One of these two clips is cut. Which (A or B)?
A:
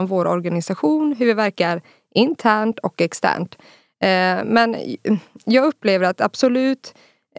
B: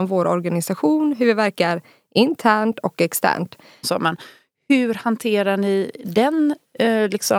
B